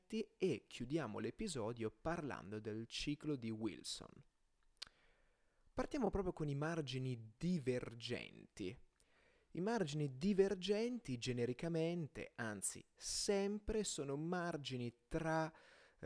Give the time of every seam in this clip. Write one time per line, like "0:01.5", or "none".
none